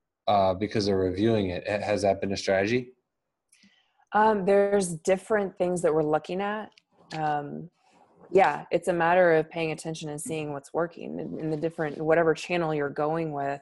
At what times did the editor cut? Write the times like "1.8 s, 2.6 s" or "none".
none